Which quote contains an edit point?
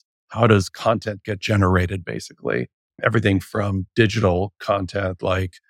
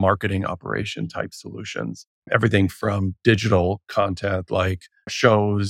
second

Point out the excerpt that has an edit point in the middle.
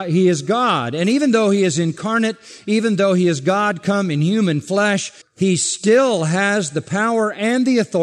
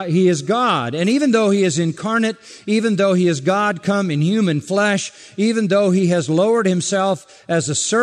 first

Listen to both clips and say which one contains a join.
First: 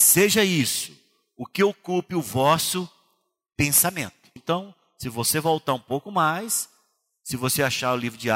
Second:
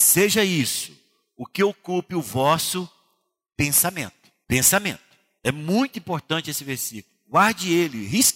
first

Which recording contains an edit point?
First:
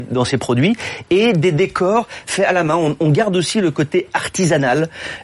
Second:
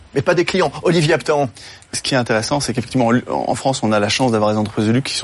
second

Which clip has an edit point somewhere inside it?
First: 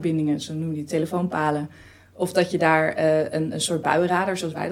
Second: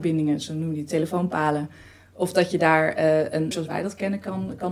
second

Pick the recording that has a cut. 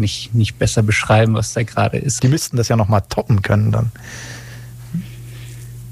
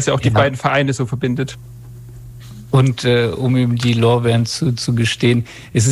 first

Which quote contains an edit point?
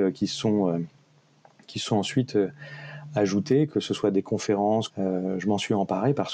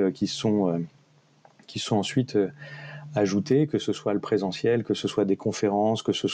first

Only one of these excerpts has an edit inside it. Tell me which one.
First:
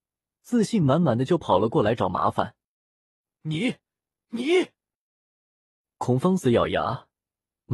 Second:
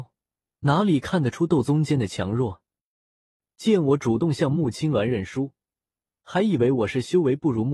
first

